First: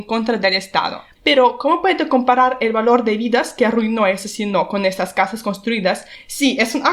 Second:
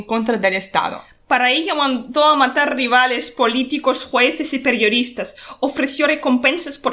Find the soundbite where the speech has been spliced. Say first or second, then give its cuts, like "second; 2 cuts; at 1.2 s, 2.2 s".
first; 1 cut; at 1.1 s